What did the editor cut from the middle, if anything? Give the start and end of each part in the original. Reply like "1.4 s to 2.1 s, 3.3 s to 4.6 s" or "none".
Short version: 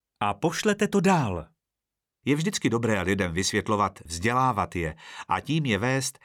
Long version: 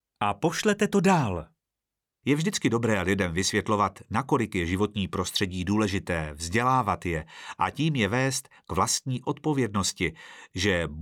4.1 s to 6.4 s